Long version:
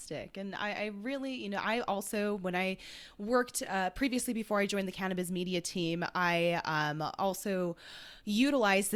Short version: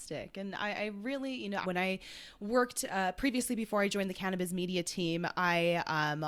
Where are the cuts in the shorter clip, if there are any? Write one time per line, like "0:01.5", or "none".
0:01.6